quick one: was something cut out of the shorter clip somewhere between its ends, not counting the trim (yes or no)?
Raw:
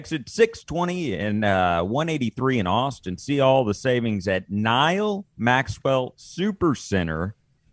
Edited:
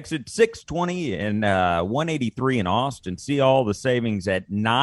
no